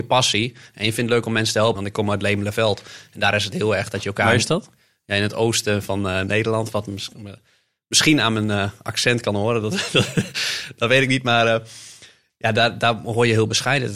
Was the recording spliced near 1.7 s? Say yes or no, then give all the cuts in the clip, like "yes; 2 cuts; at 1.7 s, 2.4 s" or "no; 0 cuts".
yes; 1 cut; at 1.7 s